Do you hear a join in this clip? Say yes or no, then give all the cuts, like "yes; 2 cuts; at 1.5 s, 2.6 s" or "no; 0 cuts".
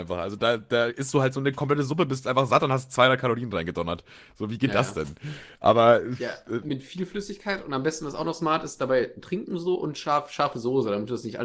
yes; 1 cut; at 6.6 s